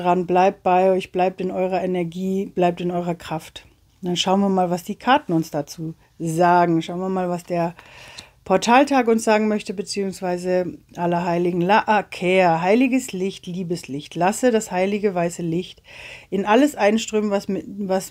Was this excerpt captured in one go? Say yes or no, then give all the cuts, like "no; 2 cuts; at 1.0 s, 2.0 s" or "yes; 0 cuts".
yes; 0 cuts